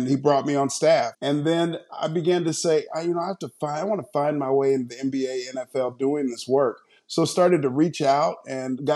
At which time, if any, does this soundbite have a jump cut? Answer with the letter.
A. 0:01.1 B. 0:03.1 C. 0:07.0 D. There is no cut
A